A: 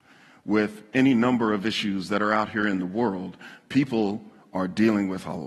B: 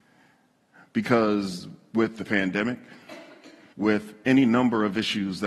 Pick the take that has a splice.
B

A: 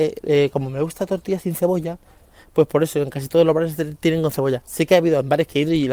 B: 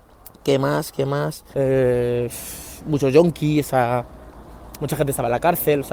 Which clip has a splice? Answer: B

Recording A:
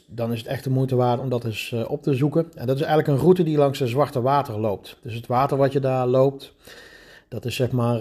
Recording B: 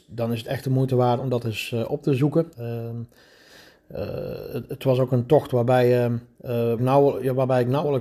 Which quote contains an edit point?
B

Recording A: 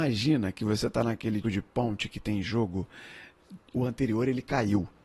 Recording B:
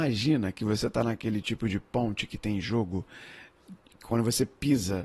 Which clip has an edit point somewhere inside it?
A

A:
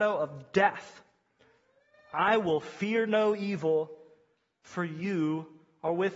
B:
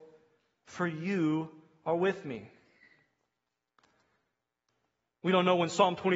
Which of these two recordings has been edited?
B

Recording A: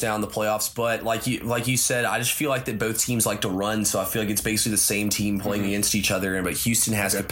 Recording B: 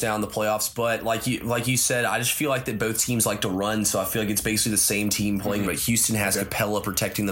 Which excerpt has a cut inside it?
B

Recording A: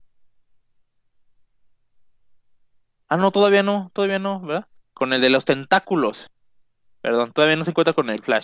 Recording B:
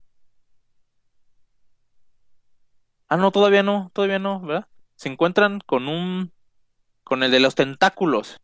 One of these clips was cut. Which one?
A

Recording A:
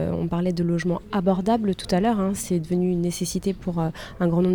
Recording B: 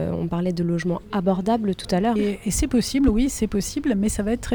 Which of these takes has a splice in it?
B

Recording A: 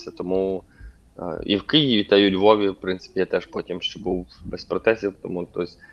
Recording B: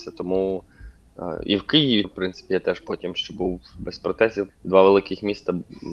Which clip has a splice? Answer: B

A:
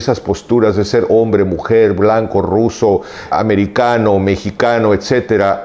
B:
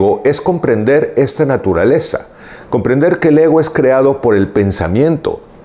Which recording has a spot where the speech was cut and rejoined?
A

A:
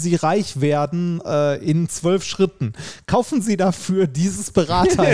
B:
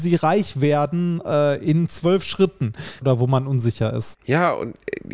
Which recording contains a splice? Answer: B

